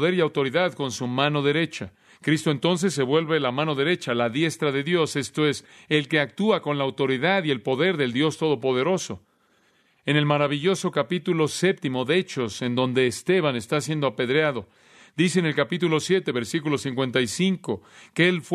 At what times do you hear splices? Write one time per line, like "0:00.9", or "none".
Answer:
none